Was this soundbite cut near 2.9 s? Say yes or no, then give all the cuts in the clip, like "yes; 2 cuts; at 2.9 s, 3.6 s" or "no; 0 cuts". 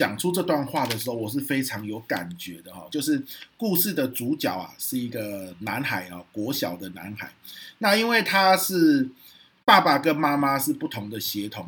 yes; 1 cut; at 2.9 s